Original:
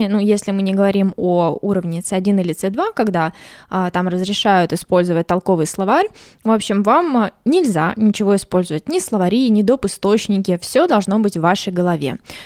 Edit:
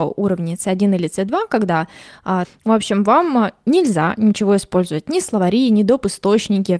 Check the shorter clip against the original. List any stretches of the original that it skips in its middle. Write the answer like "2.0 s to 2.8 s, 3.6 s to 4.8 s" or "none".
3.9 s to 6.2 s